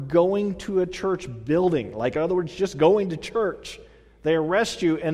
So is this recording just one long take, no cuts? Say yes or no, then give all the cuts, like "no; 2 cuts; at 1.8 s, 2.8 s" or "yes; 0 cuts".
yes; 0 cuts